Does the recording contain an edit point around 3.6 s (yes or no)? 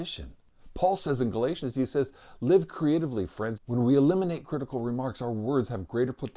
yes